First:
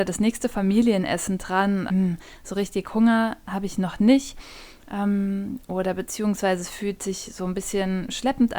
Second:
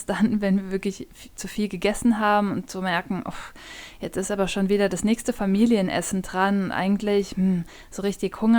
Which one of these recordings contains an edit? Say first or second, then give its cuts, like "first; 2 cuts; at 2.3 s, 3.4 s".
first; 1 cut; at 1.9 s